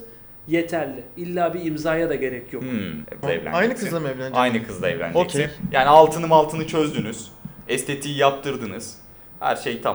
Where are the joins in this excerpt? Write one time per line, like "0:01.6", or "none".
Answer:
0:03.2